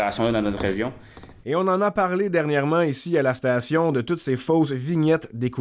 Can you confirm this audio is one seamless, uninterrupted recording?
no; 1 cut; at 1.4 s

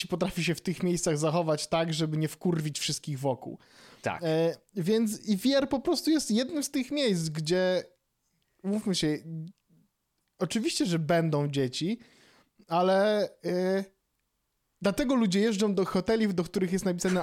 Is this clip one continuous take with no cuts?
yes; 0 cuts

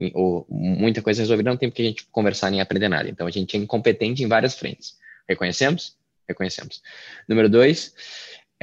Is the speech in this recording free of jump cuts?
yes; 0 cuts

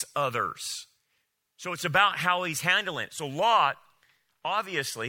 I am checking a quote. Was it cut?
no; 0 cuts

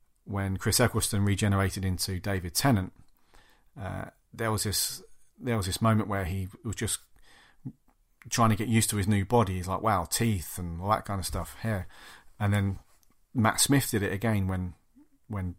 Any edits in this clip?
no; 0 cuts

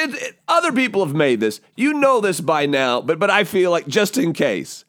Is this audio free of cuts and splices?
yes; 0 cuts

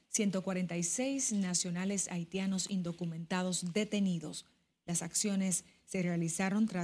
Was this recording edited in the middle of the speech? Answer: no; 0 cuts

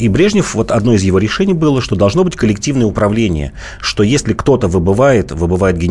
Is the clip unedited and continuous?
yes; 0 cuts

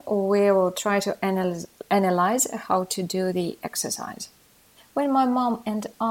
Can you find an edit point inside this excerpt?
yes; 1 cut; at 4.8 s

